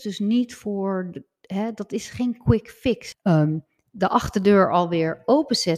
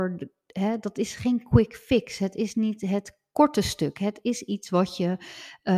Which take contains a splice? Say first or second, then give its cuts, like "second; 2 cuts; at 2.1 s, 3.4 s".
first; 1 cut; at 3.1 s